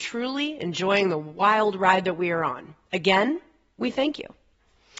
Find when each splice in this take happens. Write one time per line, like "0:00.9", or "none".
none